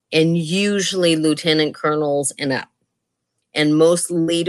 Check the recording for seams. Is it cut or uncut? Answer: cut